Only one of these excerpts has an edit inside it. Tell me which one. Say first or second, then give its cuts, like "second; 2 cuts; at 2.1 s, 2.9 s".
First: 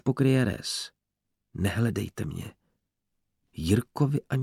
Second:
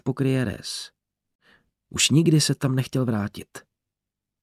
first; 1 cut; at 1.3 s